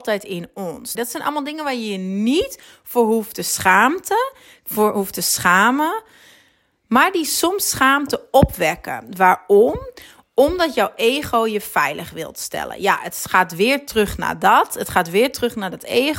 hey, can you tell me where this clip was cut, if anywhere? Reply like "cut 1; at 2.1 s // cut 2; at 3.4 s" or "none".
cut 1; at 0.9 s